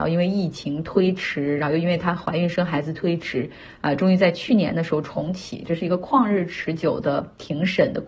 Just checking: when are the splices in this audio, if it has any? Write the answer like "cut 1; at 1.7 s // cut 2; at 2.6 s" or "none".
none